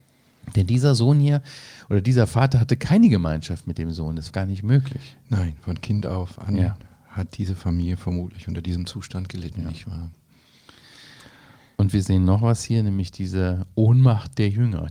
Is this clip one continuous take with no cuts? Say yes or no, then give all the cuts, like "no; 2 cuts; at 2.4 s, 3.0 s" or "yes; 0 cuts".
no; 1 cut; at 4.3 s